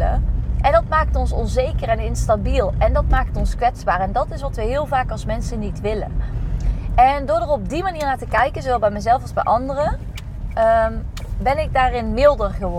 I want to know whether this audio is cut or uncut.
uncut